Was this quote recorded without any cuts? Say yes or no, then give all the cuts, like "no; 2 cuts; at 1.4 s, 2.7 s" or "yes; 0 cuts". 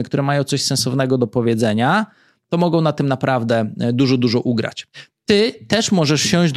yes; 0 cuts